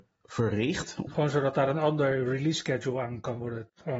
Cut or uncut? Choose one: cut